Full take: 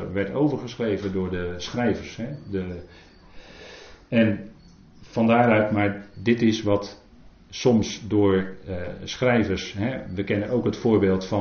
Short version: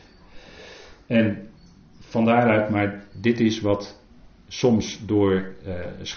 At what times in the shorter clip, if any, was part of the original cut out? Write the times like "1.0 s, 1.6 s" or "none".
none